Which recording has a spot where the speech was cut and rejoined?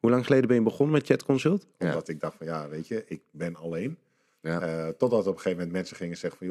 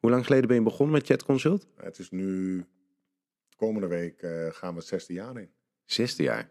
first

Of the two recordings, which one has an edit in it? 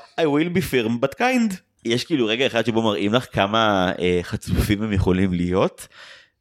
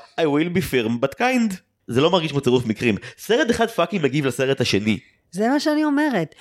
first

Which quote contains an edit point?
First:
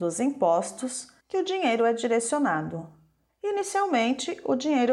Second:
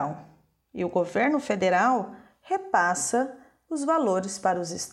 first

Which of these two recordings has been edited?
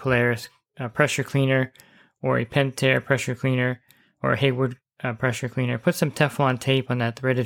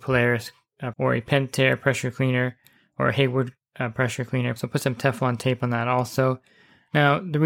second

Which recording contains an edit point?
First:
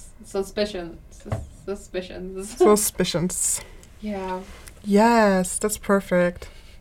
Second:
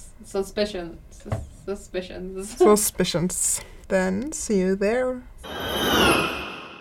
second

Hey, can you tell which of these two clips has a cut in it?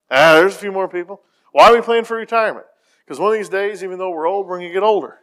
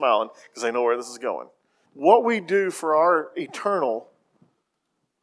second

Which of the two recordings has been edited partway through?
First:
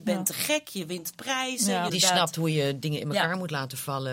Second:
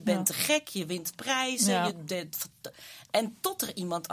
first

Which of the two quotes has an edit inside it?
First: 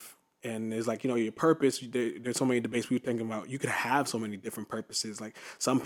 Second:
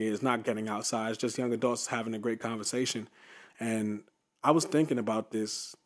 second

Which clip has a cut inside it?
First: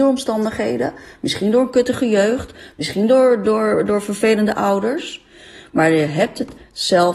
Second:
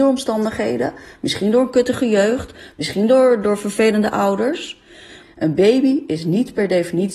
second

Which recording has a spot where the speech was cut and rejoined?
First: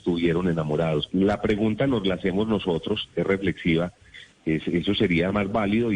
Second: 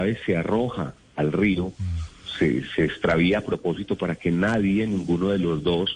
first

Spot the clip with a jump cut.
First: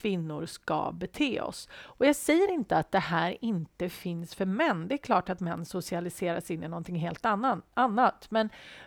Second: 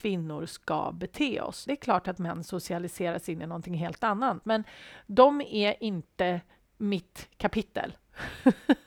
second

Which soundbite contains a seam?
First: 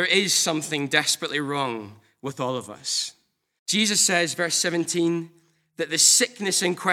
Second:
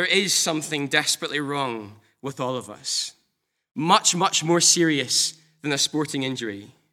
first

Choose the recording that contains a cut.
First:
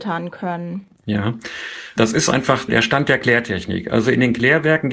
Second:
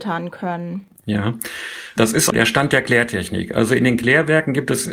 second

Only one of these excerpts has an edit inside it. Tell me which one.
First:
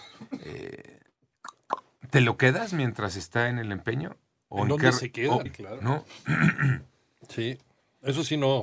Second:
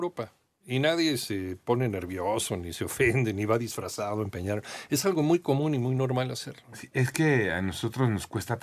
first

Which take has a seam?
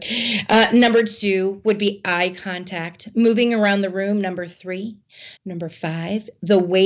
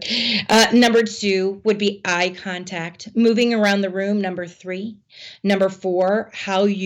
first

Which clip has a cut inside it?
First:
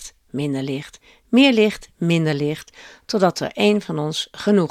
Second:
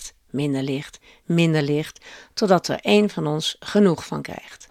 second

